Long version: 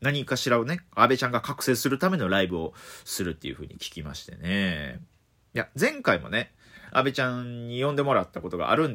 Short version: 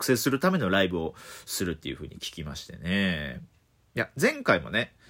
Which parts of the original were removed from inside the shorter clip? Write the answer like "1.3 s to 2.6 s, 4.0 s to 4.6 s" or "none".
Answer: none